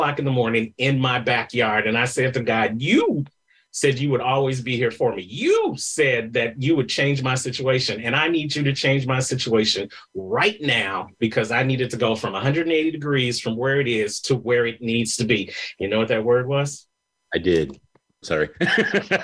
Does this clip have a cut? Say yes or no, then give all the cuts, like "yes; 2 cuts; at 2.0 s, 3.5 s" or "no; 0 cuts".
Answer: yes; 2 cuts; at 15.8 s, 18.2 s